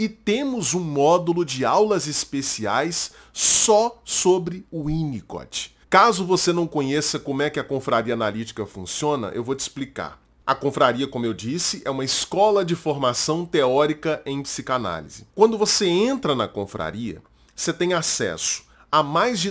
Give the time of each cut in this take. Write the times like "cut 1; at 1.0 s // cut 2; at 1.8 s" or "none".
cut 1; at 5.8 s // cut 2; at 15.3 s